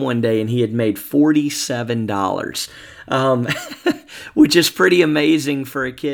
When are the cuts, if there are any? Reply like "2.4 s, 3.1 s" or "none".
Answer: none